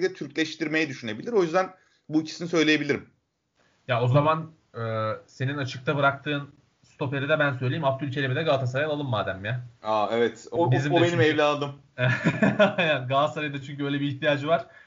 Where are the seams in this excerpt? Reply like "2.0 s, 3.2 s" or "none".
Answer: 10.6 s